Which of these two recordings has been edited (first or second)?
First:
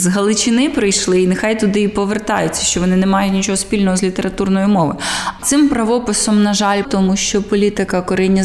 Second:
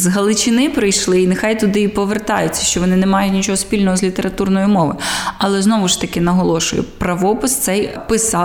first